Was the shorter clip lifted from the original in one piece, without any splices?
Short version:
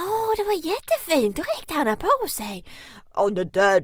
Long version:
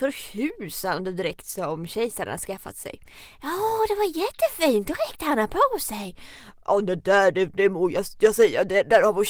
yes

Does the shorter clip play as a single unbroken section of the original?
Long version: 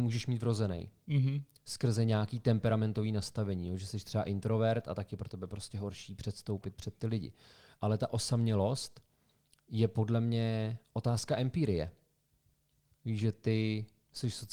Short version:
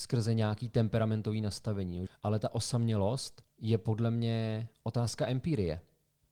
no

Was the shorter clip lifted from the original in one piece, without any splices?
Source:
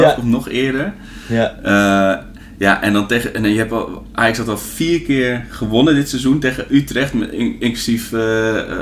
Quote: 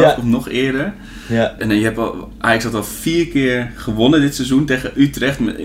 no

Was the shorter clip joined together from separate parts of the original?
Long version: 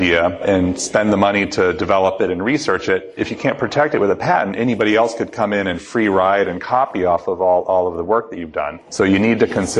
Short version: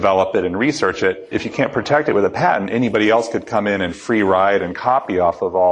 no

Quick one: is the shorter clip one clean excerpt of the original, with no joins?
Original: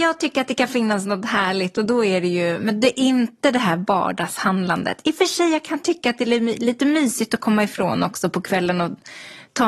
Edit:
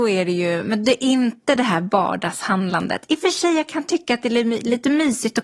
yes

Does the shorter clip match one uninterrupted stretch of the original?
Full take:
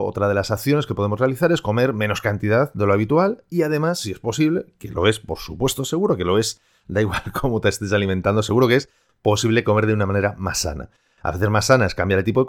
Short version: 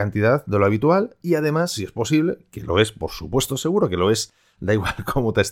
yes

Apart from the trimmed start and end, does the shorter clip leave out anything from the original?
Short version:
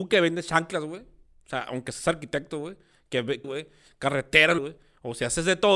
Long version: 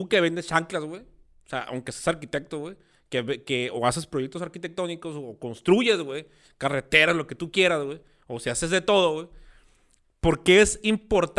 yes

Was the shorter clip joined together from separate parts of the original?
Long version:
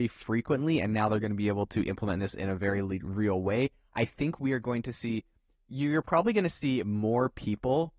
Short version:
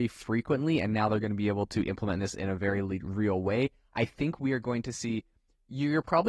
no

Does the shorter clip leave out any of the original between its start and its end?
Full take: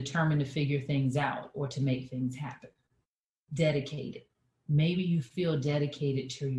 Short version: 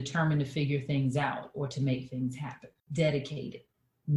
yes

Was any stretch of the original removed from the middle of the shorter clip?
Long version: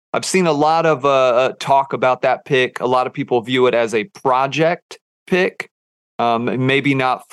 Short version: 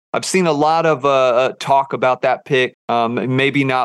yes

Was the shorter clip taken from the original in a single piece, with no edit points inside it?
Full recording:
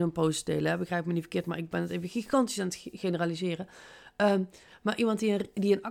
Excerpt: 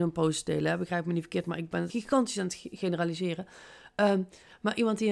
no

